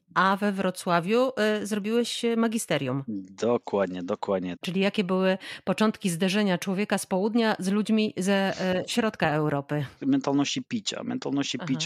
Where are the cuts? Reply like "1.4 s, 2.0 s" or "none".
4.6 s, 10.0 s